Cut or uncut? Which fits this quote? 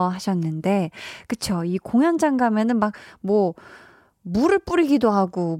uncut